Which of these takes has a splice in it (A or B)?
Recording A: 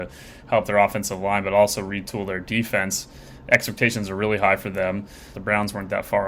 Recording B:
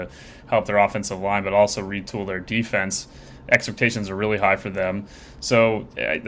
A